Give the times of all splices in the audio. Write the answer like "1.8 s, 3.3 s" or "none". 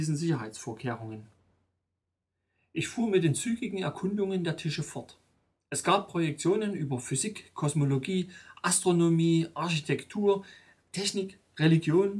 none